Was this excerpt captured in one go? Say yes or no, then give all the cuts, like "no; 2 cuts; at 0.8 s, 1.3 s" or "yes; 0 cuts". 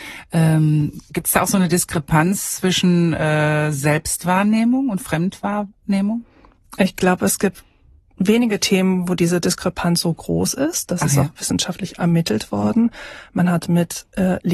yes; 0 cuts